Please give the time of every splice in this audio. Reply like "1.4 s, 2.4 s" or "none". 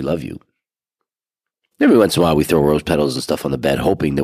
none